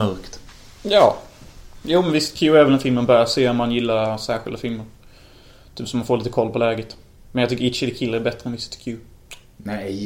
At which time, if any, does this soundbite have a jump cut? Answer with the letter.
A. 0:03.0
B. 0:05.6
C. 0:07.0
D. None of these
D